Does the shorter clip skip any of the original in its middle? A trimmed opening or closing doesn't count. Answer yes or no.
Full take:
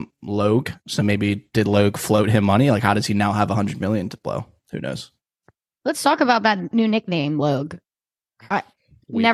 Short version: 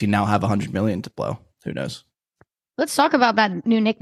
no